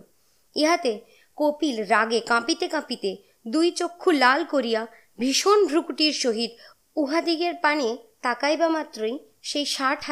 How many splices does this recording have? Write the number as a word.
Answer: zero